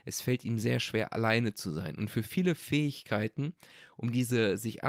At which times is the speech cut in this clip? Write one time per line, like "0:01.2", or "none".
none

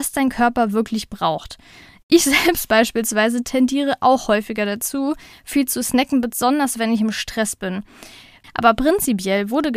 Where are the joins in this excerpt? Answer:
0:08.4

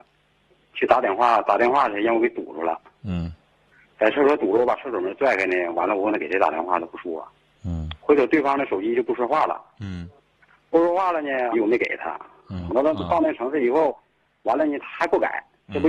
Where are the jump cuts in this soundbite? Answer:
0:11.5
0:12.7

